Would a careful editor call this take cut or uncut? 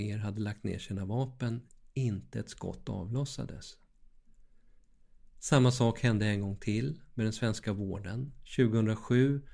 uncut